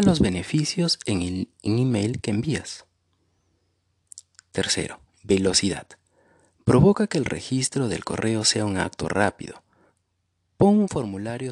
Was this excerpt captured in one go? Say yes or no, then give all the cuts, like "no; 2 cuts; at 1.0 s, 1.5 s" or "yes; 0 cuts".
yes; 0 cuts